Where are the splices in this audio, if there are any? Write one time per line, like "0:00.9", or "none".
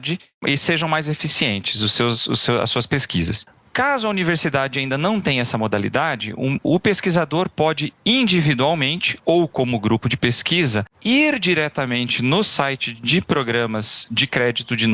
none